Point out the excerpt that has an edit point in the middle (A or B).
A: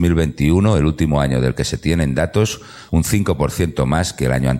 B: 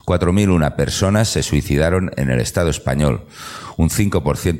A